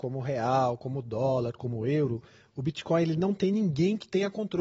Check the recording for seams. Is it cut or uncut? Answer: uncut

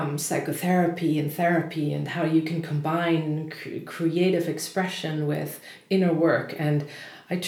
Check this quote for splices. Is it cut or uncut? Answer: uncut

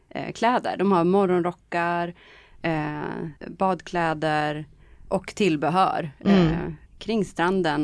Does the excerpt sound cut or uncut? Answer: cut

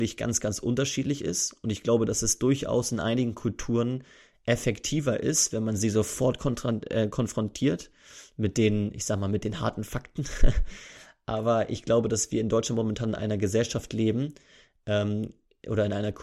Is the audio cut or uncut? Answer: uncut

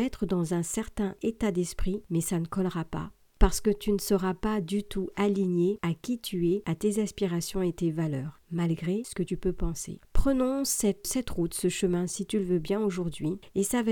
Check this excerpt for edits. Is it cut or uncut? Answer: uncut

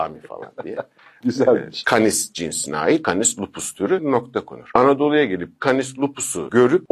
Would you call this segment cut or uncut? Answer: cut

